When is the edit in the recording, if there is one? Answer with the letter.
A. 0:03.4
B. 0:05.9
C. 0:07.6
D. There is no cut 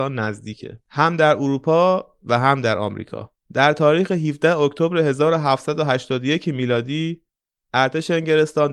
A